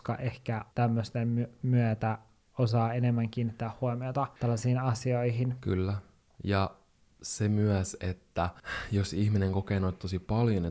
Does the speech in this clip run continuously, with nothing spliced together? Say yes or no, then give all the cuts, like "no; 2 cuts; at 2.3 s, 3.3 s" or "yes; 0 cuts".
yes; 0 cuts